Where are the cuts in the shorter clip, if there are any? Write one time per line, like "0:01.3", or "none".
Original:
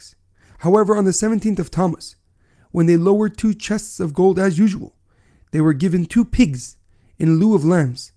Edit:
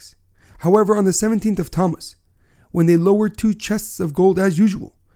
none